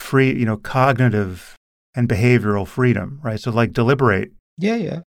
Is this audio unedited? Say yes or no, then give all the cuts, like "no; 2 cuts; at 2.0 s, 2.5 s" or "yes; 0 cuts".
yes; 0 cuts